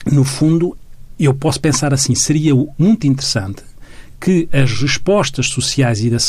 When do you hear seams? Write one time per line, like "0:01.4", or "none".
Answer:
none